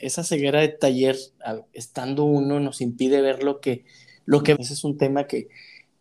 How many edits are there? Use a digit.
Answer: 1